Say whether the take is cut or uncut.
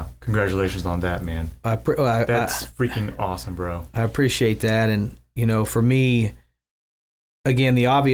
uncut